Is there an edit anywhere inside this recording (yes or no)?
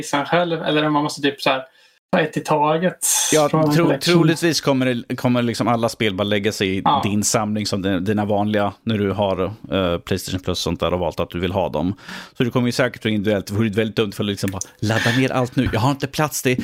no